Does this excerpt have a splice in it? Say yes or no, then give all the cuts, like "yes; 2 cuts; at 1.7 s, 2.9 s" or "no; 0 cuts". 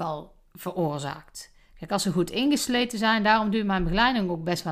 no; 0 cuts